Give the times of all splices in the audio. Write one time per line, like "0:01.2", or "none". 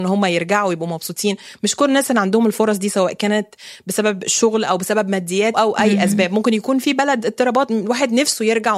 0:05.5